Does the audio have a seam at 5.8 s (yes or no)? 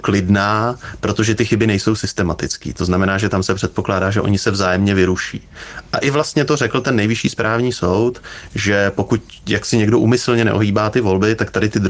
no